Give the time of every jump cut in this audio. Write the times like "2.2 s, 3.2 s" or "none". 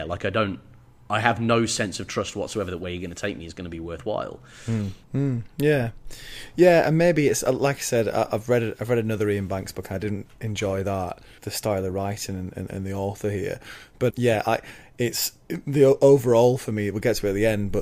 5.0 s, 11.4 s, 14.1 s

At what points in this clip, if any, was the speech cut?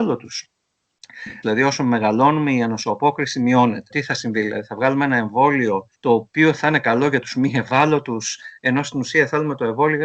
1.4 s, 3.9 s, 5.9 s

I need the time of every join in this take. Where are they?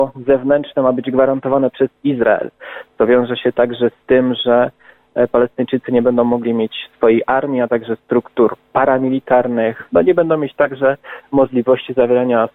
none

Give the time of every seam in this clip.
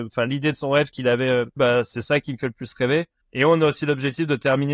1.6 s, 3.2 s

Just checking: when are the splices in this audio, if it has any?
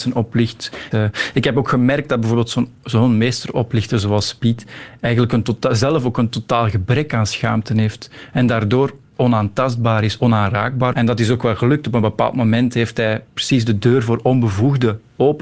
0.9 s, 10.9 s

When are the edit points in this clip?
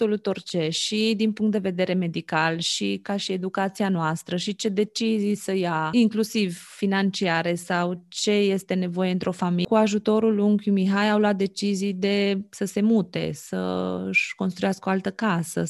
none

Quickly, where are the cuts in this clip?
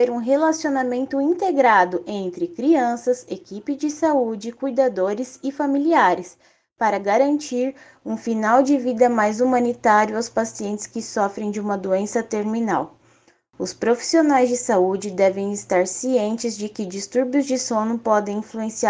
none

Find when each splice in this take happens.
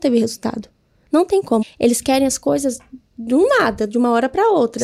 1.6 s

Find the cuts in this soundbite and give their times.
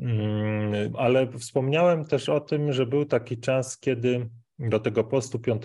0.9 s

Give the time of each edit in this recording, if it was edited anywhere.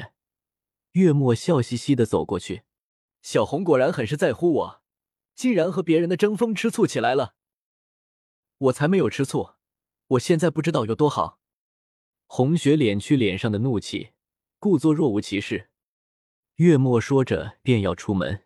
16.5 s

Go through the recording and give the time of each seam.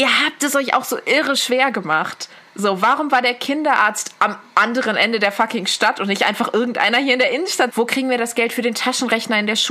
7.7 s

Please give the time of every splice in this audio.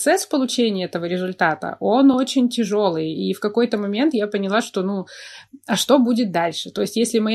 none

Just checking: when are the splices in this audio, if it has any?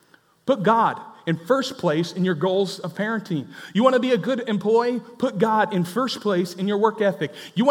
none

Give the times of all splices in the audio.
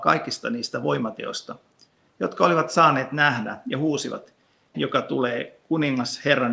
4.7 s

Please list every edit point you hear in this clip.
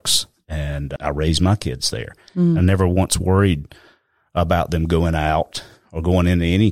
none

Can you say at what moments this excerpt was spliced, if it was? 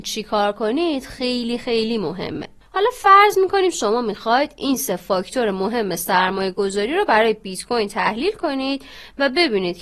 none

